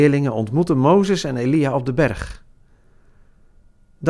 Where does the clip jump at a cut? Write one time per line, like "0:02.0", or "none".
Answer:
none